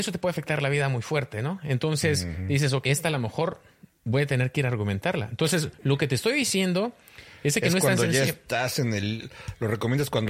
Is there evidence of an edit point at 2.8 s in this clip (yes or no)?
yes